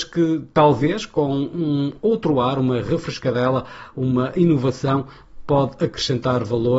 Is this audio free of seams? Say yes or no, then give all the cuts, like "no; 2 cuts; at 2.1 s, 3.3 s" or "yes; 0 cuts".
yes; 0 cuts